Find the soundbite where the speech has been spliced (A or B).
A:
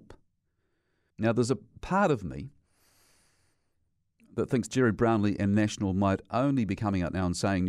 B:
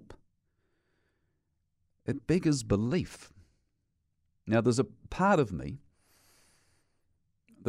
A